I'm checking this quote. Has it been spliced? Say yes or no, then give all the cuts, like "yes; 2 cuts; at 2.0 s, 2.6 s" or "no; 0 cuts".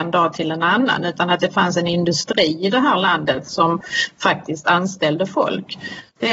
no; 0 cuts